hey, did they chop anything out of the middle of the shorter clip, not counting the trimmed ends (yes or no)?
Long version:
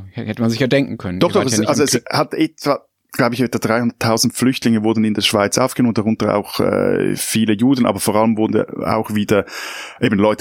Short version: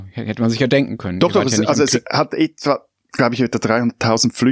no